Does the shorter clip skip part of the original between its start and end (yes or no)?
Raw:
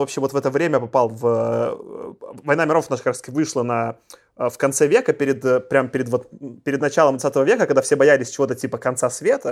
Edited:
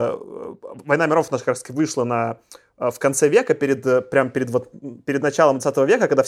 no